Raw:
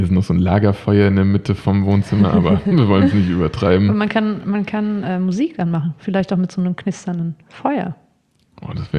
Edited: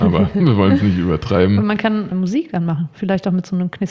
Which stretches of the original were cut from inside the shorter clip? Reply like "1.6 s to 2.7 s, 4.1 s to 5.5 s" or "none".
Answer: 4.4 s to 5.2 s